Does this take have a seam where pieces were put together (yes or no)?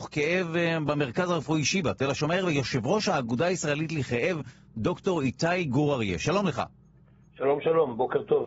no